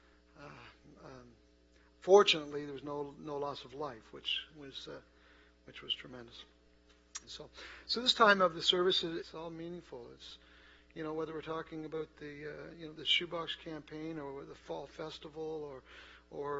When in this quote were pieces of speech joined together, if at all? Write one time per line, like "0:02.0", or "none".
0:07.2
0:09.2
0:12.9